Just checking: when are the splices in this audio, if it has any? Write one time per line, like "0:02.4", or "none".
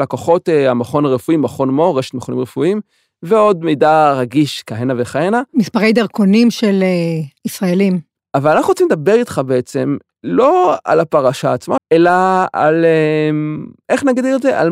0:08.2
0:11.8